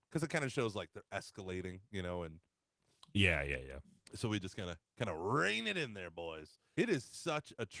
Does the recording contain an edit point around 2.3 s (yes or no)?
no